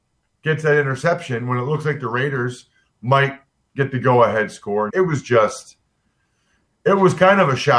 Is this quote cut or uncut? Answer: cut